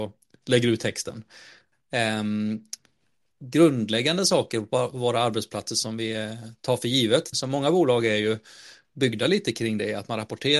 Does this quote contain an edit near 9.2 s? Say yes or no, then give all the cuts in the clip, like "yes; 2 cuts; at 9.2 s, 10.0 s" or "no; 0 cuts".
no; 3 cuts; at 1.7 s, 3.3 s, 7.3 s